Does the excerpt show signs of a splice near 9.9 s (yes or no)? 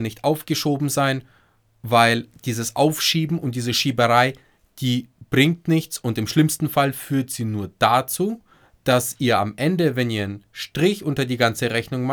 no